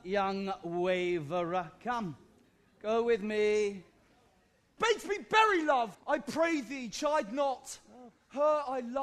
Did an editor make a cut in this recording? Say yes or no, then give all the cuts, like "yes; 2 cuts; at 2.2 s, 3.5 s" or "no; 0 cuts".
yes; 2 cuts; at 4.8 s, 5.9 s